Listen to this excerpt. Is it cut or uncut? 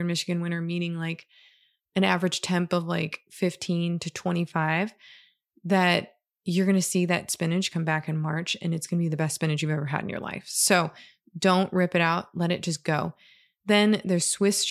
uncut